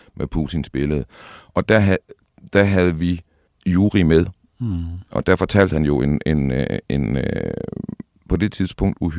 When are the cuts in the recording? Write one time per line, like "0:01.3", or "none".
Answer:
none